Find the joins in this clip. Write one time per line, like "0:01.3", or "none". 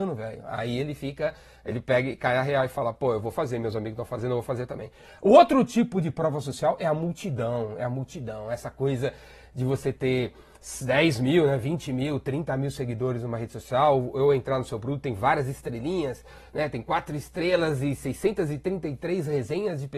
none